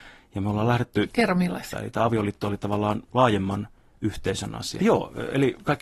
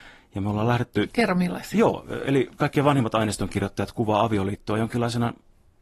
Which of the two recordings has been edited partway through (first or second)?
first